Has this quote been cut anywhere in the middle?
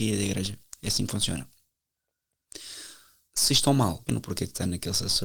yes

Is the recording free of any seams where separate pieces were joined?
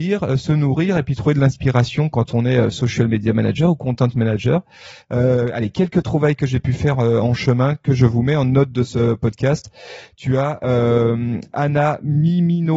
yes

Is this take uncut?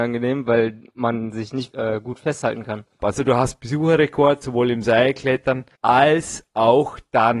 no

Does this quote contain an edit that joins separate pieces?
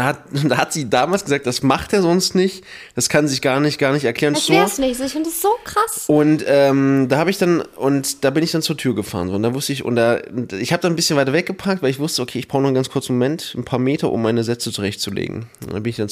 yes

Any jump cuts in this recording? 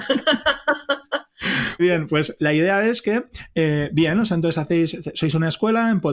yes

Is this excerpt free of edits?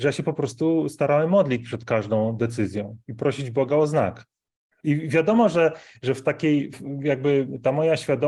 no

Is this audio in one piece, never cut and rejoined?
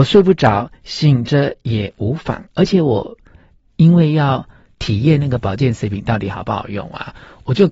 yes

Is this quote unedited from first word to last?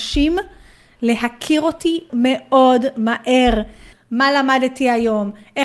no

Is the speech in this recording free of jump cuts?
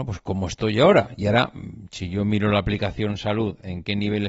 yes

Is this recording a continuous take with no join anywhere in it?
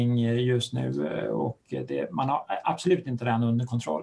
yes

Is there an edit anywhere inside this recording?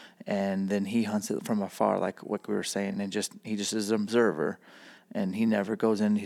no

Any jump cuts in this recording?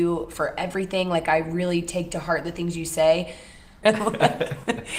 yes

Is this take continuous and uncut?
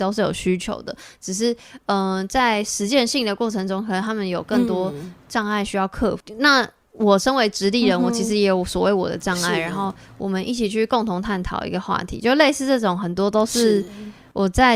yes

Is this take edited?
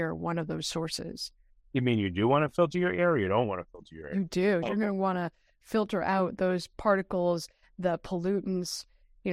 yes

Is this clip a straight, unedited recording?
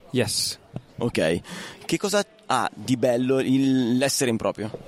yes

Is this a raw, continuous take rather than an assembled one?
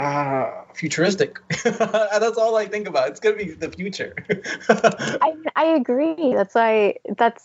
yes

